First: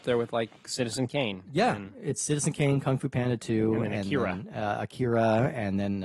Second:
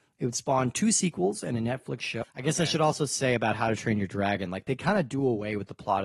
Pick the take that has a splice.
second; 1 cut; at 2.2 s

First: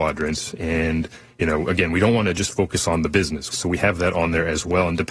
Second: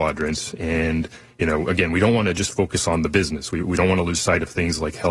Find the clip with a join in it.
first; 1 cut; at 3.5 s

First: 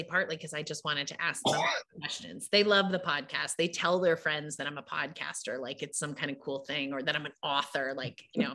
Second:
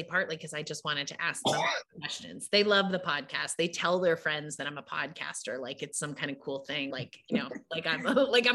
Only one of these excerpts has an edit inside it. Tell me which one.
second; 1 cut; at 6.9 s

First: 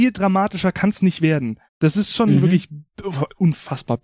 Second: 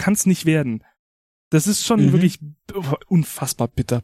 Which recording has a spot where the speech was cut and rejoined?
first; 1 cut; at 1.7 s

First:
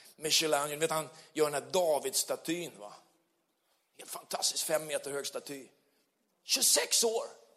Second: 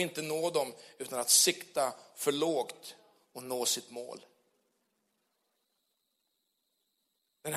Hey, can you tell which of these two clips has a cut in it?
first; 1 cut; at 6.3 s

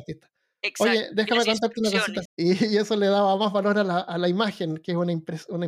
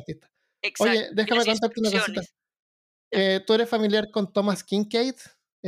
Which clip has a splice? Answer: first; 1 cut; at 2.3 s

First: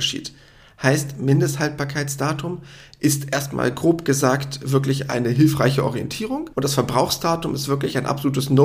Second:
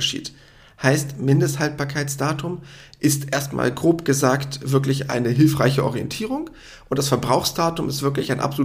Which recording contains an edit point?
first; 1 cut; at 6.5 s

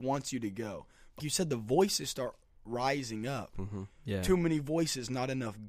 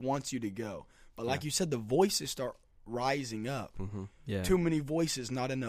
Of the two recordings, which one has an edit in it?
first; 1 cut; at 1.2 s

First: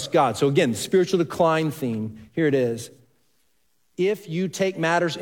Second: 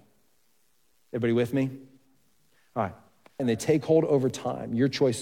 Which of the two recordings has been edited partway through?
second; 2 cuts; at 1.0 s, 3.4 s

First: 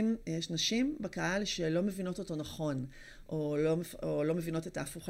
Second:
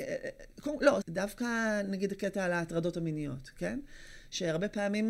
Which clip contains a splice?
second; 1 cut; at 1.0 s

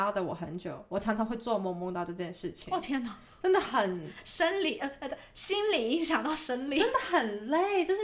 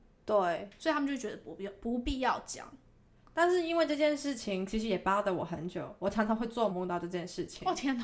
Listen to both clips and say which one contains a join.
second; 1 cut; at 6.7 s

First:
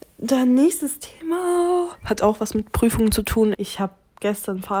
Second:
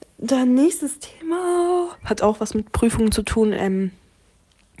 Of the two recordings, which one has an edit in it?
first; 1 cut; at 3.5 s

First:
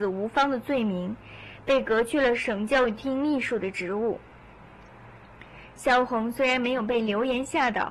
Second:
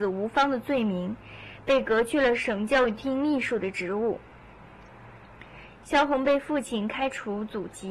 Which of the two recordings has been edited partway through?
second; 1 cut; at 5.7 s

